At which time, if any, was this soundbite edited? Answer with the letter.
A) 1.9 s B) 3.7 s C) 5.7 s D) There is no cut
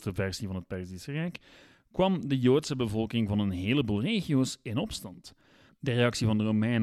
C